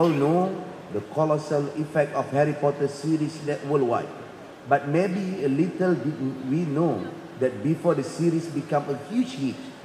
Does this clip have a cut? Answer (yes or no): no